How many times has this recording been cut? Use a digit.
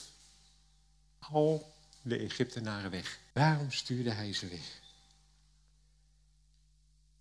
1